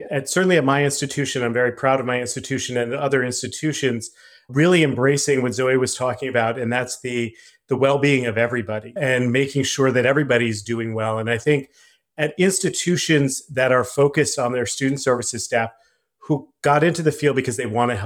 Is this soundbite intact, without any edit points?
yes; 0 cuts

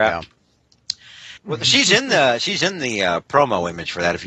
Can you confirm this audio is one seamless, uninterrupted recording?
no; 1 cut; at 1.4 s

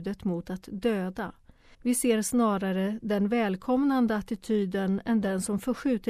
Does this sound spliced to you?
yes; 1 cut; at 1.7 s

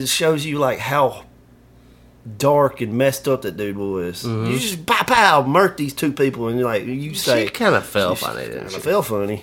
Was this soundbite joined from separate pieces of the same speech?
no; 0 cuts

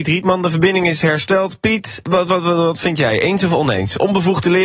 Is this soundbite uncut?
no; 1 cut; at 2.0 s

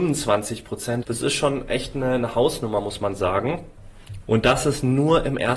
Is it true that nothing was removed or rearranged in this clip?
no; 2 cuts; at 1.0 s, 4.2 s

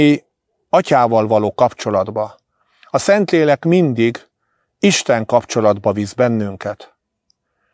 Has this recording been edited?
no; 0 cuts

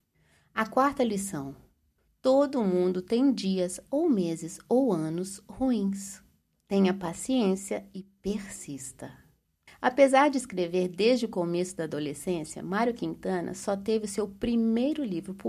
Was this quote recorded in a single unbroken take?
yes; 0 cuts

